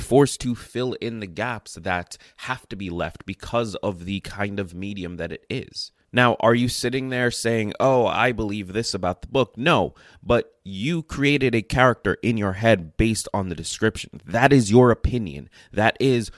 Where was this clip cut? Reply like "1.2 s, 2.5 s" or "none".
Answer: 6.0 s